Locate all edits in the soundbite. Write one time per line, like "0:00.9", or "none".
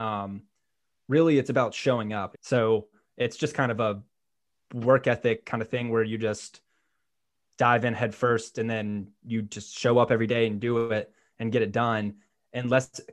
0:02.3